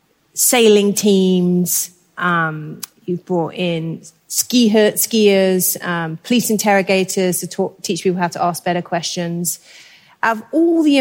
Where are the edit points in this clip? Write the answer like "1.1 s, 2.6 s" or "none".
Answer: none

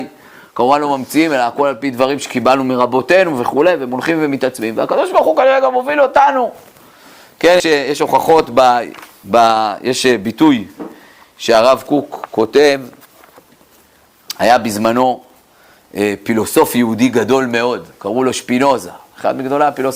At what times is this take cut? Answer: 7.6 s

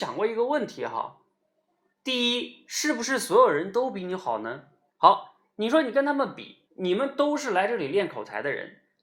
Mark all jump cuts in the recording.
4.9 s, 6.6 s

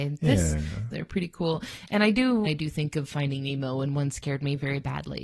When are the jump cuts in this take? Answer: 0.9 s, 2.4 s

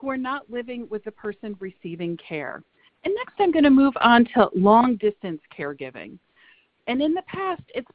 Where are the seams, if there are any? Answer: 2.9 s, 6.8 s

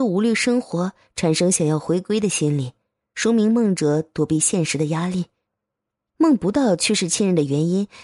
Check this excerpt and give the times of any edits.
none

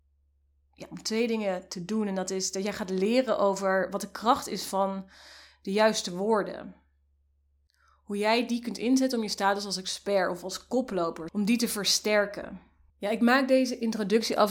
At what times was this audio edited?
11.3 s, 12.9 s

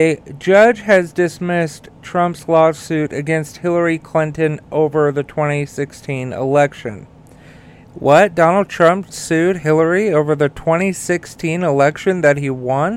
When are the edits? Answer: none

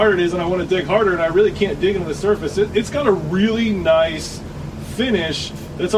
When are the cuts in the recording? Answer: none

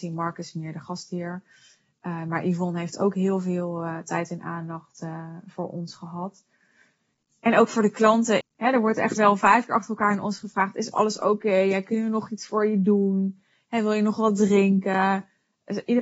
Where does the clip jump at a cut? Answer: 8.4 s

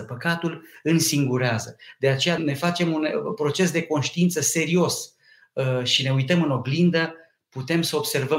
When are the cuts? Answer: 2.4 s

